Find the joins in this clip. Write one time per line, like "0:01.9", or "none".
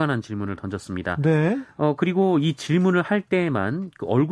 none